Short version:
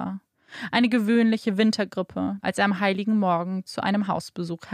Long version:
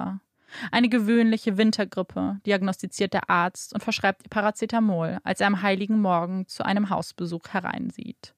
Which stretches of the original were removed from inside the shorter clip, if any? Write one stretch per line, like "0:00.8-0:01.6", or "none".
0:02.4-0:05.2